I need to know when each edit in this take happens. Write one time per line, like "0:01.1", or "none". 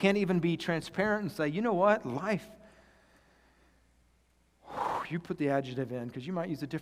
none